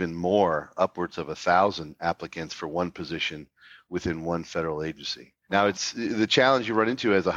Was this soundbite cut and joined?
no; 0 cuts

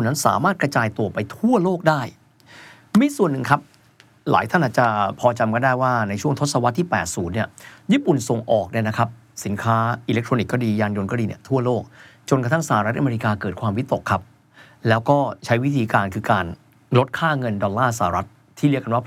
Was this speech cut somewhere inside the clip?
no; 0 cuts

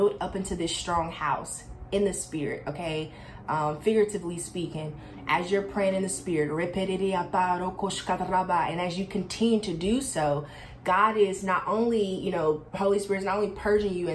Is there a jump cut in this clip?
no; 0 cuts

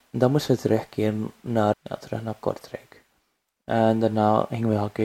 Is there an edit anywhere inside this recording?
yes; 2 cuts; at 1.7 s, 3.6 s

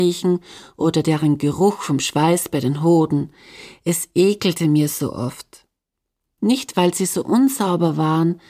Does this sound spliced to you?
no; 0 cuts

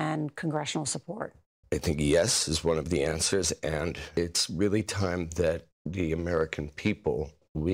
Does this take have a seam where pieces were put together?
no; 0 cuts

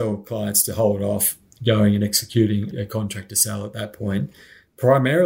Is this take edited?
yes; 1 cut; at 2.7 s

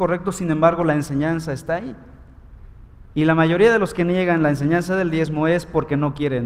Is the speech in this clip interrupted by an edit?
no; 0 cuts

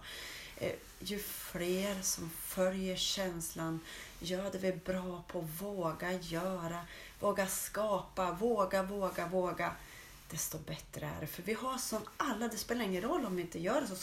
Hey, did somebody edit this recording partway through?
no; 0 cuts

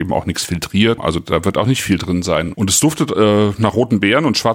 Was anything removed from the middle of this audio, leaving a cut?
yes; 2 cuts; at 1.0 s, 2.5 s

